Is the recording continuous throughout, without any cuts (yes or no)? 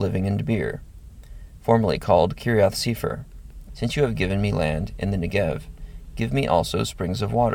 no